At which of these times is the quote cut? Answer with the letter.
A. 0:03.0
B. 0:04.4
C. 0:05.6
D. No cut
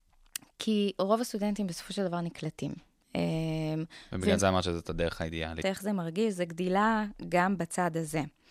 C